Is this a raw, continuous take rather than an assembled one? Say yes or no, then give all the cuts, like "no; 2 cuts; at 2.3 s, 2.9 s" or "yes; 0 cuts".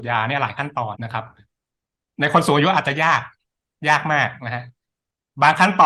no; 1 cut; at 0.9 s